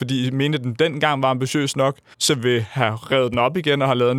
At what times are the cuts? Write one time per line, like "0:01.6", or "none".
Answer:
0:02.1